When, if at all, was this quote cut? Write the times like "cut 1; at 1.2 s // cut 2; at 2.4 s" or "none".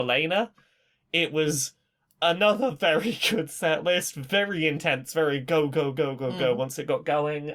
none